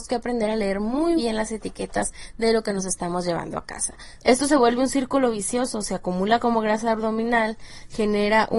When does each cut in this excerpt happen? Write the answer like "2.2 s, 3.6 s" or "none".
1.2 s, 4.2 s